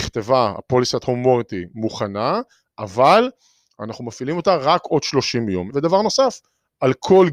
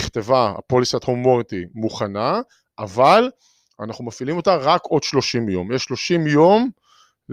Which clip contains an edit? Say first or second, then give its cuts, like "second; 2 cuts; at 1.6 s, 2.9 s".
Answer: first; 1 cut; at 5.7 s